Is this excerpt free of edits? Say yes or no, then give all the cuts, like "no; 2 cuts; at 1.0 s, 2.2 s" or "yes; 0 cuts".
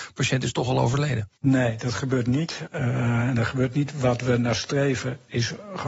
no; 2 cuts; at 1.4 s, 2.7 s